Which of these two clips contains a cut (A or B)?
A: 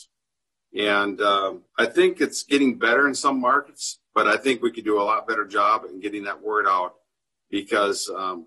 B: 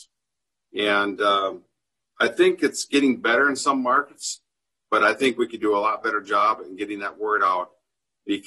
A